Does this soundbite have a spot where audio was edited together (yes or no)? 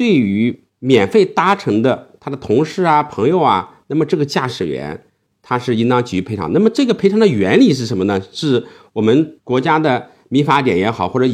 no